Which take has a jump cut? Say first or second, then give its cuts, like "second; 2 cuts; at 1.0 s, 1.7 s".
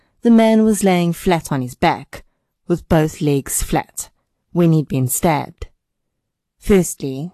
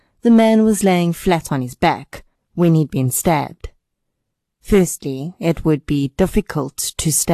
second; 1 cut; at 2.3 s